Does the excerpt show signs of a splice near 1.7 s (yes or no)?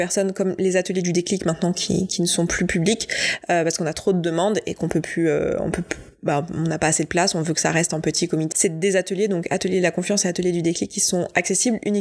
no